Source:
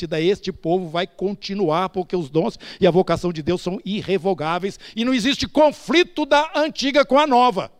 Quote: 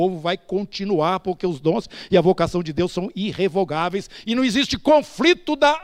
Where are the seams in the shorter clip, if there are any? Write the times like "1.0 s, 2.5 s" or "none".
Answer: none